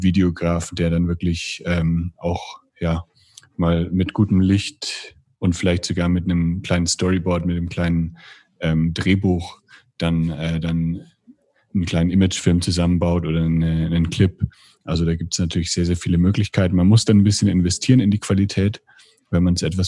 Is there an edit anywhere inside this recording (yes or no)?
no